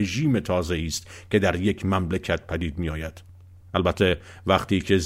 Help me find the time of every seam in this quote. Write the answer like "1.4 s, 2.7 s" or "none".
3.6 s